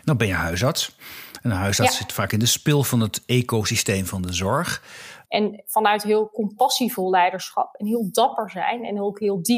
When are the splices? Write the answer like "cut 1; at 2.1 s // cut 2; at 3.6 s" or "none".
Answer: cut 1; at 5.2 s